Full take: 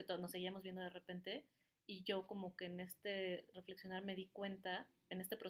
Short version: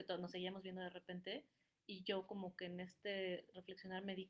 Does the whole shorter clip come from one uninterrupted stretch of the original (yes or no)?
yes